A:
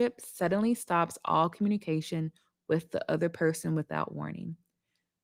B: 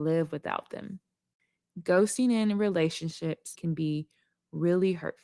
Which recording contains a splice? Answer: B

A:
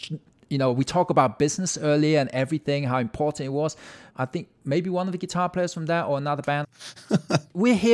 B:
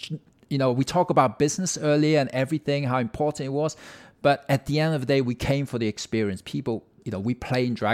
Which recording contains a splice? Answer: A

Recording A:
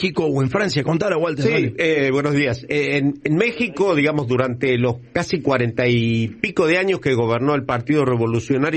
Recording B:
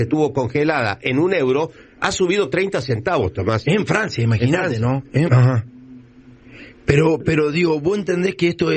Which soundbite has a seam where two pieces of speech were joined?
B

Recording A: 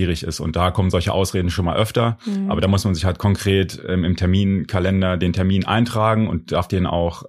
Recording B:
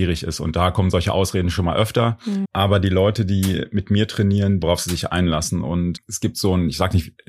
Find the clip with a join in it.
B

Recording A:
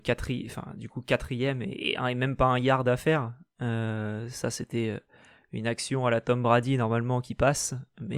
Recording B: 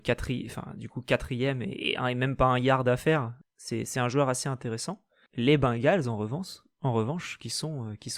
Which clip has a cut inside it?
B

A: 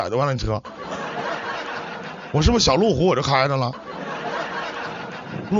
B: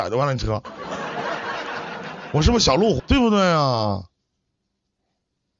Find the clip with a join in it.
B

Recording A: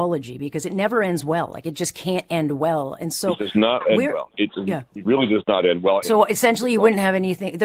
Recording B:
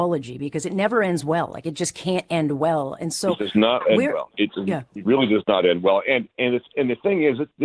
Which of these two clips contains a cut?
A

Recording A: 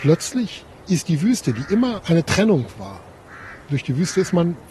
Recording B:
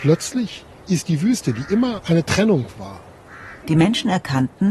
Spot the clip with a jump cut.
B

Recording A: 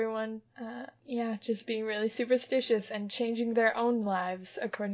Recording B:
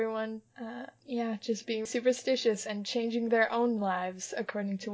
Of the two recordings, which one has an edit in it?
B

